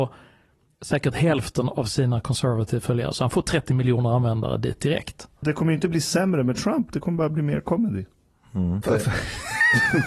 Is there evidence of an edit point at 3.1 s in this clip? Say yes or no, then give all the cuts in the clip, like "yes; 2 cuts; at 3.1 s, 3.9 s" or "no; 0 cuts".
no; 2 cuts; at 5.4 s, 8.8 s